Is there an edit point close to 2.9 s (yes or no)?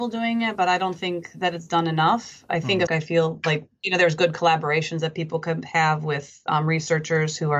yes